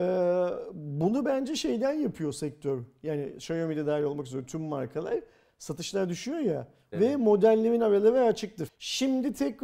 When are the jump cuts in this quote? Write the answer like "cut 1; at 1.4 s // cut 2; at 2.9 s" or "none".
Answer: cut 1; at 6.9 s // cut 2; at 8.7 s